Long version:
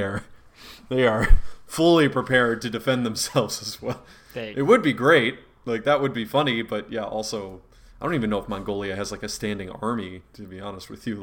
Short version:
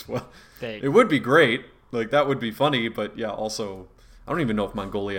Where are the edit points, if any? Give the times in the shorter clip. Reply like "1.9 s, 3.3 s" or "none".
none